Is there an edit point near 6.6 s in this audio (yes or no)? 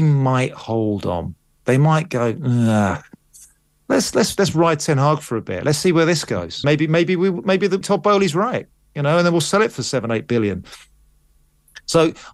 yes